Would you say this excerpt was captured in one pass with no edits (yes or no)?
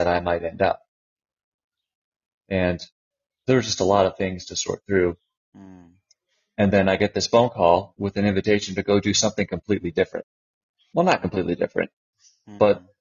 no